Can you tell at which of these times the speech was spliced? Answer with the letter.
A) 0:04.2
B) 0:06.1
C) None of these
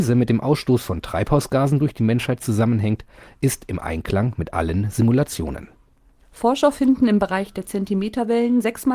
C